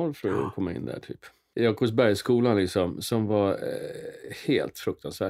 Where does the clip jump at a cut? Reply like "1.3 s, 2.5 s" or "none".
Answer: 1.5 s